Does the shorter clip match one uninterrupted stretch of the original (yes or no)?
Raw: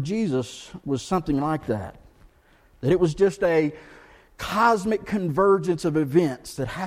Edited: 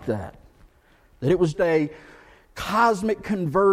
no